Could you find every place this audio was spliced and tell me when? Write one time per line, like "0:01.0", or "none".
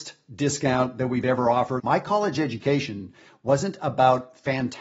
0:01.8